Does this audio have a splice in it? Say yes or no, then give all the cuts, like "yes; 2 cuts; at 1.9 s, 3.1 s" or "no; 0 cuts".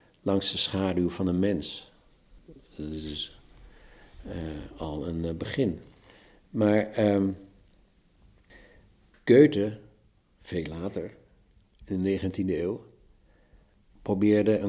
no; 0 cuts